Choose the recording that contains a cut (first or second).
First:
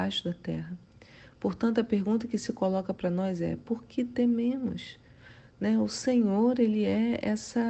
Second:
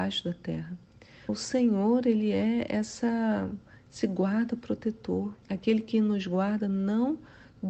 second